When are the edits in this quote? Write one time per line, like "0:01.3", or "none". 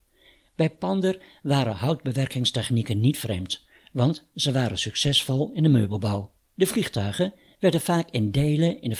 0:06.4